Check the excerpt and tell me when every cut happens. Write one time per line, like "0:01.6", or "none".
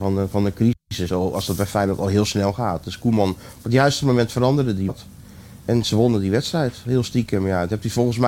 none